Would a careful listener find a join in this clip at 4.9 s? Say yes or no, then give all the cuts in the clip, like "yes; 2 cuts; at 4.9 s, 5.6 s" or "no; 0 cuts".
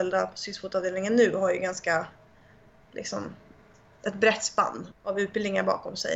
yes; 1 cut; at 4.9 s